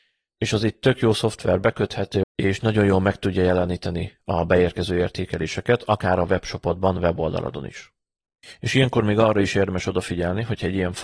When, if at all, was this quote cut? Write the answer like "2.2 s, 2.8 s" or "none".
2.2 s